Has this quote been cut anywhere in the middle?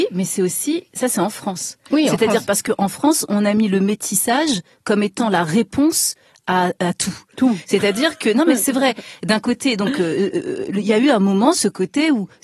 no; 0 cuts

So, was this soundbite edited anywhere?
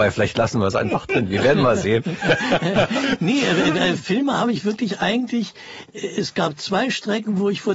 no; 0 cuts

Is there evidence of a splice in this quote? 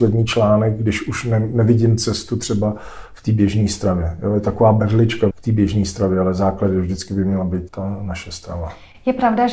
yes; 2 cuts; at 5.3 s, 7.7 s

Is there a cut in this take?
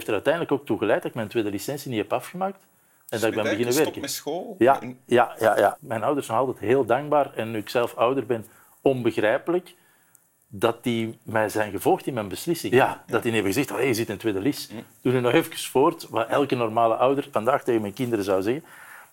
yes; 3 cuts; at 5.8 s, 12.7 s, 17.3 s

